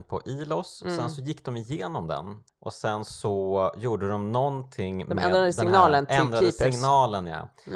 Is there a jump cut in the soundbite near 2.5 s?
yes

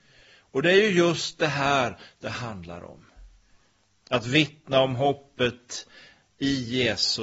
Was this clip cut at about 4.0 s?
yes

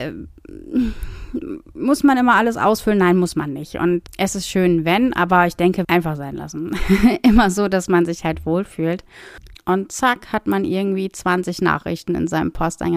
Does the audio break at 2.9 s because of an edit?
no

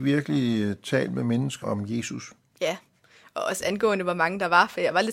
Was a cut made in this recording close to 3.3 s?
no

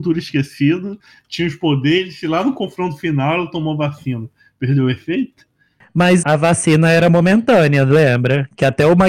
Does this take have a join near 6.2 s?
yes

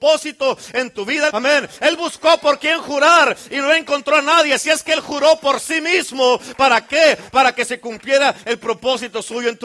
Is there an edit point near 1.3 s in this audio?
yes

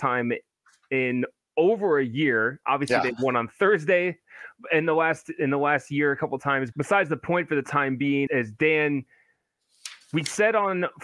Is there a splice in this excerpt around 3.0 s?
no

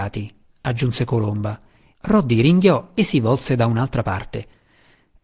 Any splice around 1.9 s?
yes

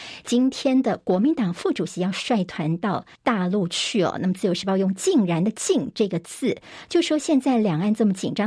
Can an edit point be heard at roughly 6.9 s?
no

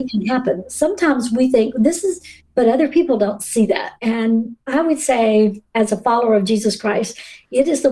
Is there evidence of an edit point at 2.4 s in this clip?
yes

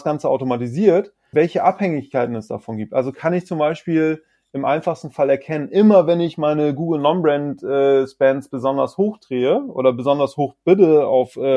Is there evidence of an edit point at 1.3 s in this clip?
yes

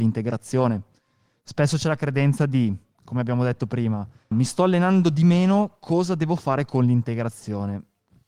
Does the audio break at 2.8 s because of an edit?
no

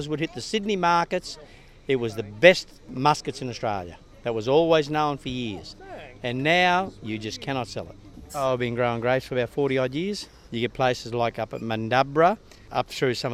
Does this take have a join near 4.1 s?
no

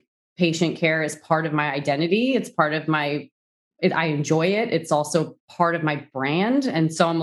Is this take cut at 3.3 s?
no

